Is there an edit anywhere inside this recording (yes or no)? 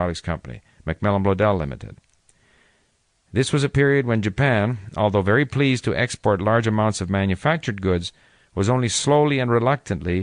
no